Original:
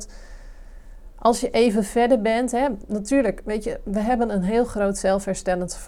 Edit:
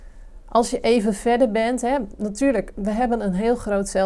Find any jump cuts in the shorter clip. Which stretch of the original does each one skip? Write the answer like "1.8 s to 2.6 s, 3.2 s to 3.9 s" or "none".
3.4 s to 3.8 s